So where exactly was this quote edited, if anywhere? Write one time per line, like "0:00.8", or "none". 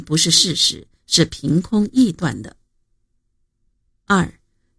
none